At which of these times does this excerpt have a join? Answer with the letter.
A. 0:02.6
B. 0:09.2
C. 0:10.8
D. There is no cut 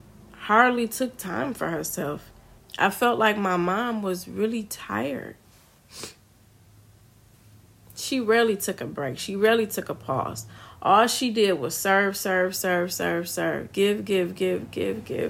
A